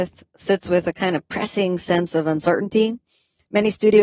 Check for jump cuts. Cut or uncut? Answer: uncut